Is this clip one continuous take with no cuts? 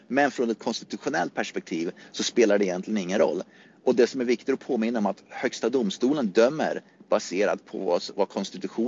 yes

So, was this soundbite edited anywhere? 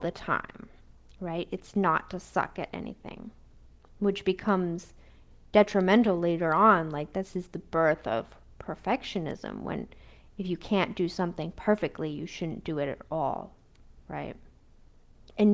no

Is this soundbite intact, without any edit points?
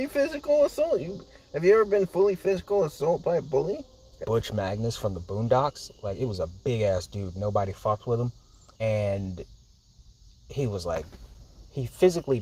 no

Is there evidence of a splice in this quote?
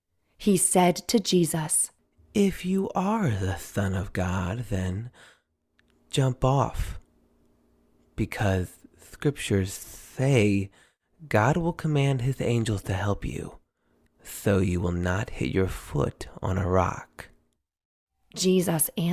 yes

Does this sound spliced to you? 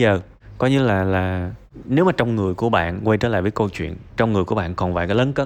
yes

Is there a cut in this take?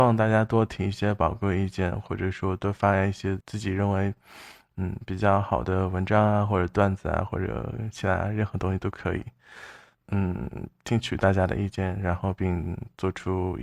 yes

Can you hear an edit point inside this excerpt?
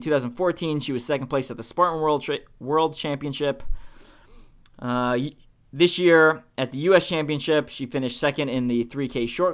no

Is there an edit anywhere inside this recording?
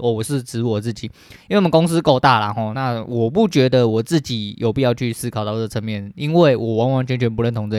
no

